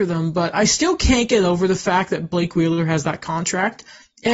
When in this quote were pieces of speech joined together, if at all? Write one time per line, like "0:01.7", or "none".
none